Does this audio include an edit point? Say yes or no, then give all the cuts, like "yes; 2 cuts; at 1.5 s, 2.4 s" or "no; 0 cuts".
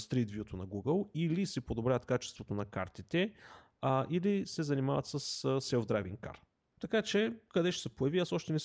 yes; 1 cut; at 6.7 s